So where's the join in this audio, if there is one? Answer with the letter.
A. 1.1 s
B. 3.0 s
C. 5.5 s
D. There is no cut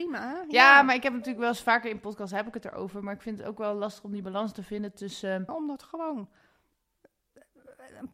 C